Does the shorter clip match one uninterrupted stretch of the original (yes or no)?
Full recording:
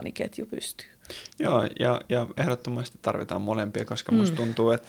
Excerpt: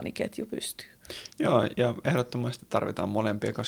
no